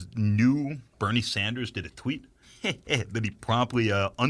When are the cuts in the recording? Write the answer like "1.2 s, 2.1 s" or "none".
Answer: 0.9 s